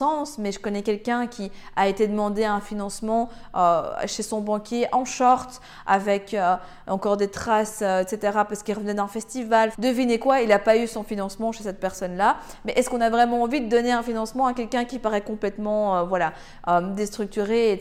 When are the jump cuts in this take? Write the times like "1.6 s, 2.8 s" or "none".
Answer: 9.7 s